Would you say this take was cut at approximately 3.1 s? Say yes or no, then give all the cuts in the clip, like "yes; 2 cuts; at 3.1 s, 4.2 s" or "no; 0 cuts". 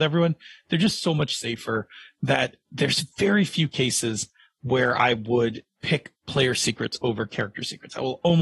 no; 0 cuts